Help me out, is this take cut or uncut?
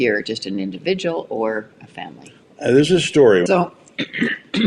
cut